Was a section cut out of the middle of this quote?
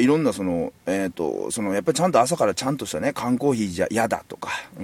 no; 0 cuts

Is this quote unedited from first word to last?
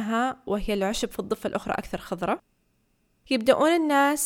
yes; 0 cuts

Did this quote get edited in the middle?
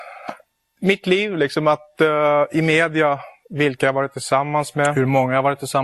no; 0 cuts

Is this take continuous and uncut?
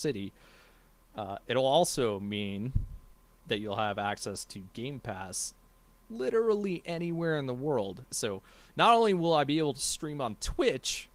no; 1 cut; at 8.1 s

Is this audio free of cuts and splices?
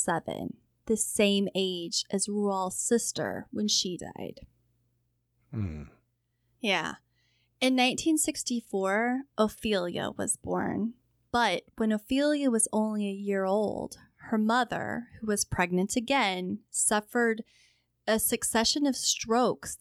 yes; 0 cuts

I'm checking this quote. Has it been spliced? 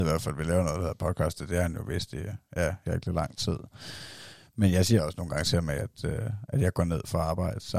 yes; 1 cut; at 2.9 s

